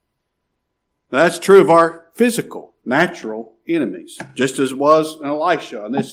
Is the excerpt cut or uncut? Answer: uncut